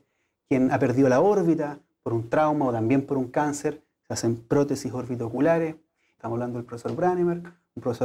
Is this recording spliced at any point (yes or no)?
yes